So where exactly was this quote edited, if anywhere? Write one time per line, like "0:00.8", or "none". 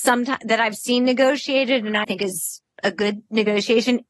0:02.0